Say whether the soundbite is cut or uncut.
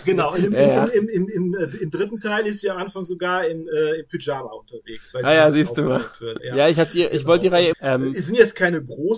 cut